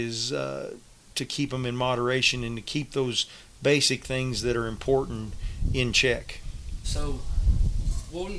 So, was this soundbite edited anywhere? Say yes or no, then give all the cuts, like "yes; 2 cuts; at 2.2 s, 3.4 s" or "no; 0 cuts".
yes; 1 cut; at 6.8 s